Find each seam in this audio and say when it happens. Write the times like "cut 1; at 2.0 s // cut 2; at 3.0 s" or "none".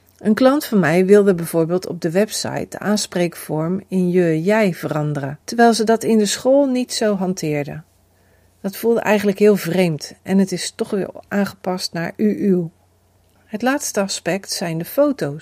cut 1; at 5.4 s